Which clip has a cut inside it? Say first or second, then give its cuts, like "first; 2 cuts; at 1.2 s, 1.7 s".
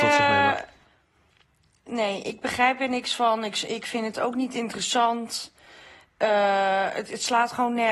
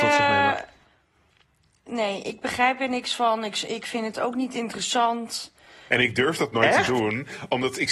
second; 1 cut; at 5.9 s